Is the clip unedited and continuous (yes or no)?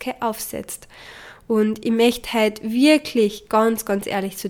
yes